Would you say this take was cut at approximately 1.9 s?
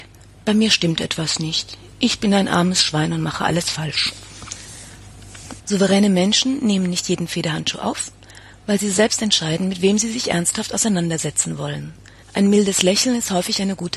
no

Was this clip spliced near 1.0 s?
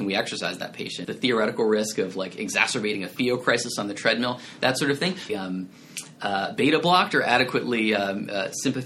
yes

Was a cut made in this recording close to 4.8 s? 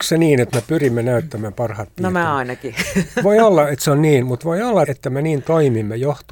yes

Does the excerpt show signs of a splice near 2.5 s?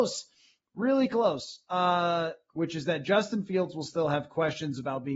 yes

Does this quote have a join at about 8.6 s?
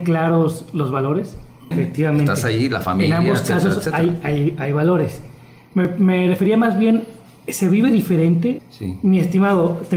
yes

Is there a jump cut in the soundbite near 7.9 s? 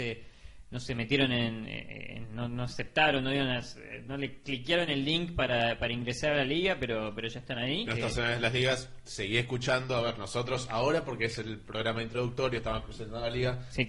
yes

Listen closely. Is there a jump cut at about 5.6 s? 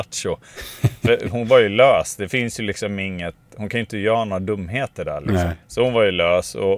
yes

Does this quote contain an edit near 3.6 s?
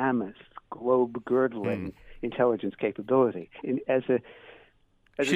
yes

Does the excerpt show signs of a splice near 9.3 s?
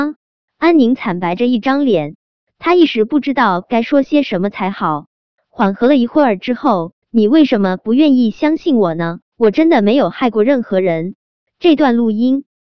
yes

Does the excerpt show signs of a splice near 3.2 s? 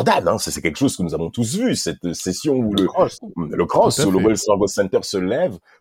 yes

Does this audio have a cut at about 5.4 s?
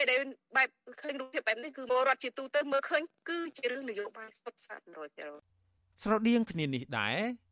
no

